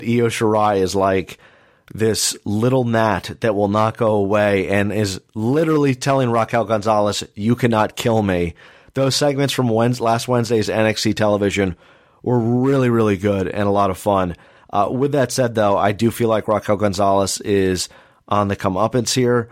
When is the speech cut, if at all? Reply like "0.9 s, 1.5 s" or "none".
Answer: none